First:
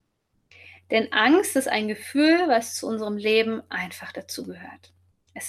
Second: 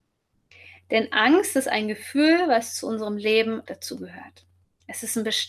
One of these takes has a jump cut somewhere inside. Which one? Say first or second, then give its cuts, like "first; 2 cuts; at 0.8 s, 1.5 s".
second; 1 cut; at 3.7 s